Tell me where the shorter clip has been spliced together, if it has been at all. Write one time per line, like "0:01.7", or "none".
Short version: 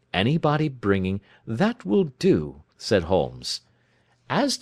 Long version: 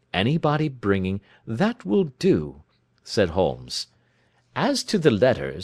0:02.7

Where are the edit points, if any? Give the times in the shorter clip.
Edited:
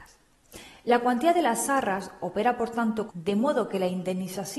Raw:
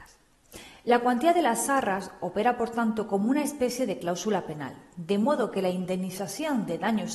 0:03.1

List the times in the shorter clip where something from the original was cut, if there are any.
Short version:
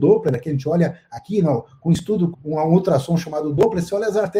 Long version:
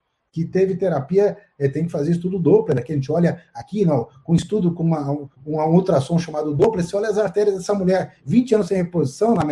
0:02.3

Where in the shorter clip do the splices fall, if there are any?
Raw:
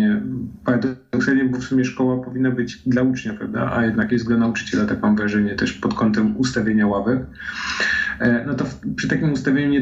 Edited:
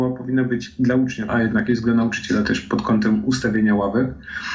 0:01.3
0:02.4

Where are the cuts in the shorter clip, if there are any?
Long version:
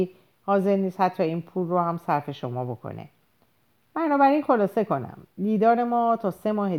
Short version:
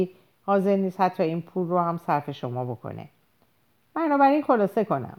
none

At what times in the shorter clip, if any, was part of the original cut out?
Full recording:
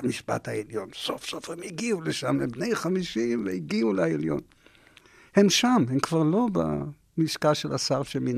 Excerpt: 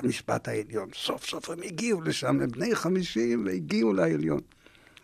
none

